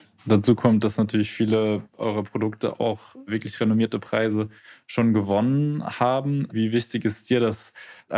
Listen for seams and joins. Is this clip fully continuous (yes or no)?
yes